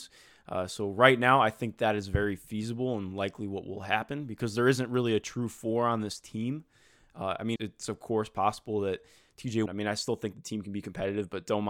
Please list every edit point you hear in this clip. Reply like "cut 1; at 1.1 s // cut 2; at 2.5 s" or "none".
cut 1; at 7.6 s // cut 2; at 9.7 s